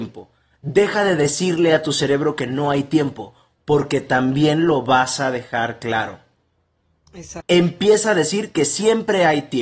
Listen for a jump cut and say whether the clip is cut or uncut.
cut